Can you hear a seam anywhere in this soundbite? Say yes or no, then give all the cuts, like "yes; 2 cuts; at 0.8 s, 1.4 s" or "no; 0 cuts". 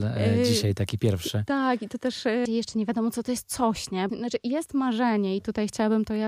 yes; 2 cuts; at 2.5 s, 4.1 s